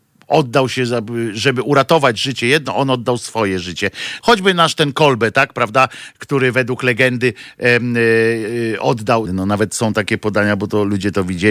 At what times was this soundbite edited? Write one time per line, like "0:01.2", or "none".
0:04.2
0:09.3